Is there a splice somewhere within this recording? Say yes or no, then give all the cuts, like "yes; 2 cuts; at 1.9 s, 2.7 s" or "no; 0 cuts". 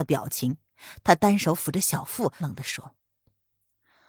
yes; 1 cut; at 2.4 s